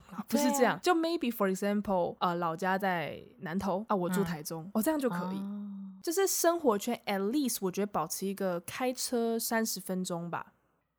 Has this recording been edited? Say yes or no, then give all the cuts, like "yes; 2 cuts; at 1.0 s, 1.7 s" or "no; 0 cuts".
no; 0 cuts